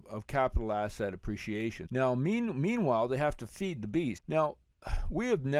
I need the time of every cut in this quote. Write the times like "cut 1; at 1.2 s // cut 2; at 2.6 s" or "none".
cut 1; at 1.9 s // cut 2; at 4.2 s